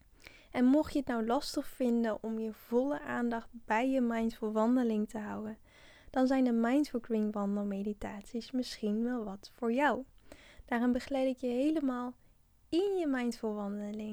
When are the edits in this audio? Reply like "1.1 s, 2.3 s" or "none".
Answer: none